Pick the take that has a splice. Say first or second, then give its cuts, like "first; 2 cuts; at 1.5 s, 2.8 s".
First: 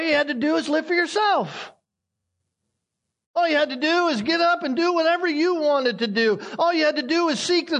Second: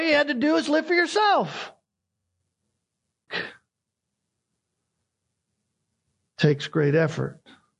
second; 1 cut; at 3.3 s